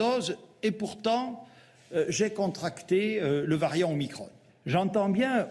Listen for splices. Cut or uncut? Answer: cut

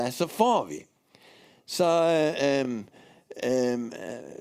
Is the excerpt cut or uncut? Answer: uncut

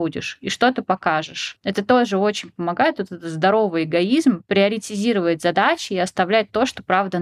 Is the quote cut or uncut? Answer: uncut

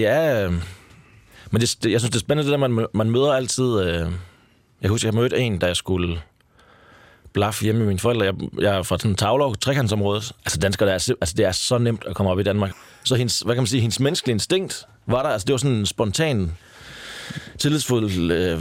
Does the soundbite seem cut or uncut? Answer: cut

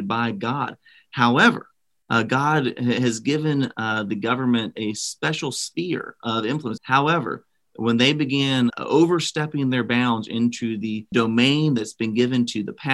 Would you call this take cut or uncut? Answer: cut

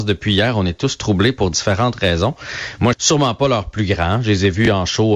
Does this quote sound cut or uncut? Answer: cut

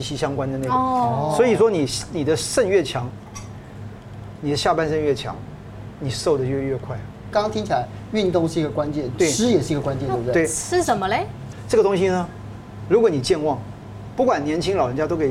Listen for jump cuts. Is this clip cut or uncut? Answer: uncut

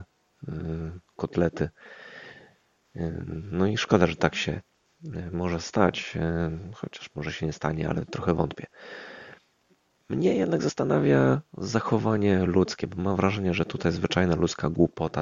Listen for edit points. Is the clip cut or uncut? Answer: uncut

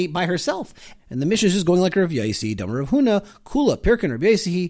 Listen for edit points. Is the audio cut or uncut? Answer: cut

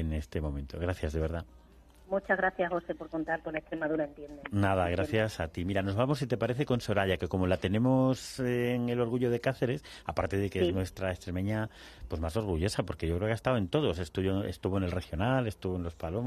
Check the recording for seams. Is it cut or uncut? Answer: uncut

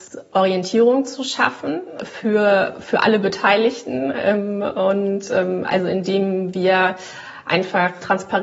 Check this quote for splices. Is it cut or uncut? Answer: uncut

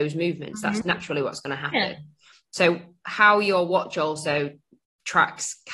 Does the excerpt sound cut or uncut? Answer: uncut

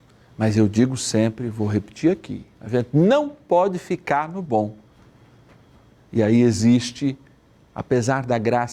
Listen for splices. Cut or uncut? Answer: cut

